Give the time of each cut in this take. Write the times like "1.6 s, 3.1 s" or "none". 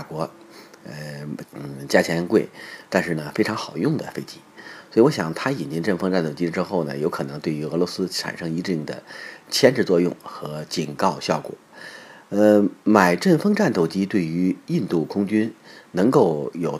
1.4 s

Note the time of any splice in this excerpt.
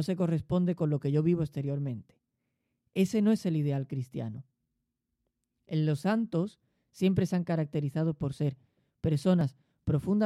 none

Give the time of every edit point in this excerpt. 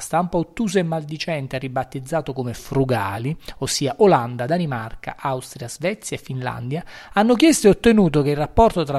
none

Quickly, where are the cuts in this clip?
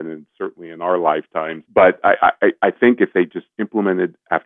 1.7 s

